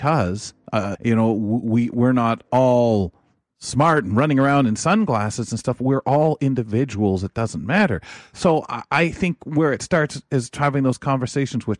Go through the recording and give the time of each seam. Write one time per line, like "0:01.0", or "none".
0:00.9